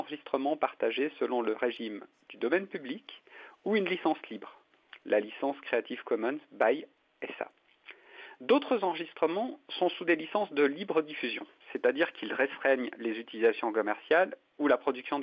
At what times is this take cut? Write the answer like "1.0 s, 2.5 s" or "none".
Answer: none